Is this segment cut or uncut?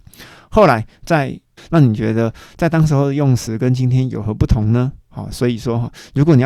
cut